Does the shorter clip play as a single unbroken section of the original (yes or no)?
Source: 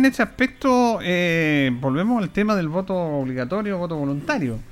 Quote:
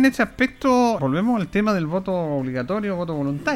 no